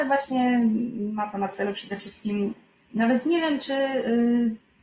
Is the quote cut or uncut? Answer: uncut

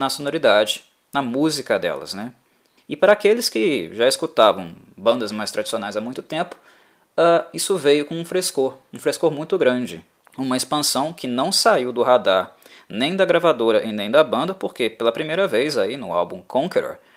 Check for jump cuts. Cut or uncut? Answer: cut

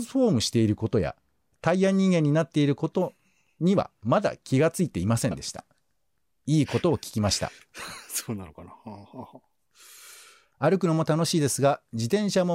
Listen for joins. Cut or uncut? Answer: uncut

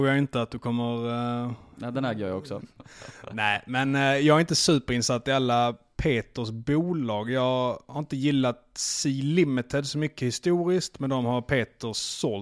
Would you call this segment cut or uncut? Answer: cut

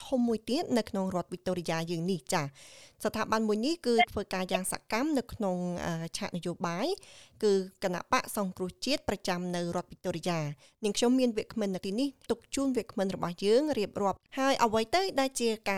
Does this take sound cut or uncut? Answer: uncut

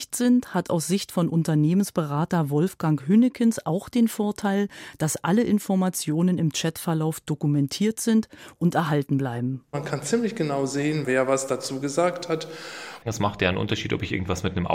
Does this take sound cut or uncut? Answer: cut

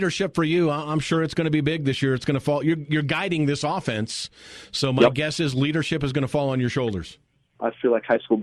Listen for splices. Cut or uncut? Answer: cut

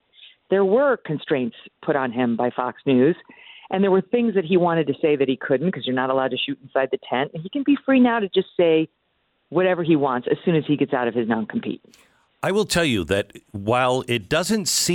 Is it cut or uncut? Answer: uncut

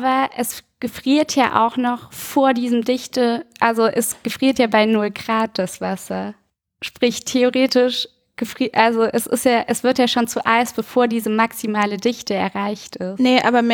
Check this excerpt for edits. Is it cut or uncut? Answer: uncut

